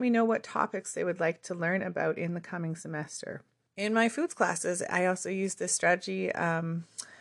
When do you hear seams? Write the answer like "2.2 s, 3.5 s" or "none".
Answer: 3.6 s

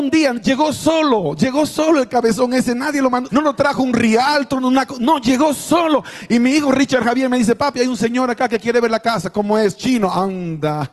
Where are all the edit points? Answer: 3.3 s

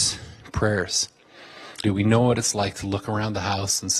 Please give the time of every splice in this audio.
1.8 s

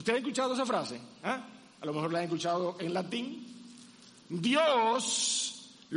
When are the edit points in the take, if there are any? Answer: 4.2 s

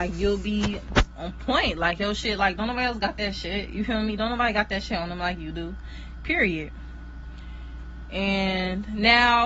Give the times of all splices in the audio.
none

